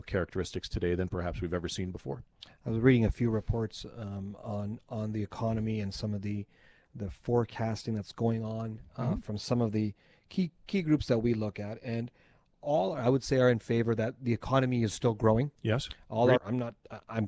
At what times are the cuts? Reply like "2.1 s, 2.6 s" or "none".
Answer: 16.4 s